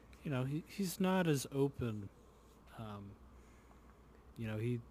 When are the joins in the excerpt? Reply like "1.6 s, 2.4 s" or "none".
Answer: 2.6 s